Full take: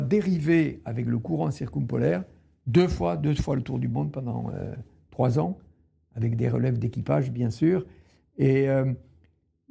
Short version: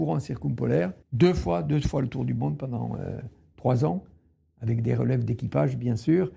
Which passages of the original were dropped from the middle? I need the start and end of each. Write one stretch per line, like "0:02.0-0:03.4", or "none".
0:02.3-0:02.6